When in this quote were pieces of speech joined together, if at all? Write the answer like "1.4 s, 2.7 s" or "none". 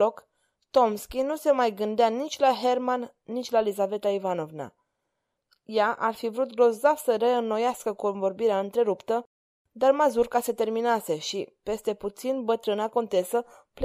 none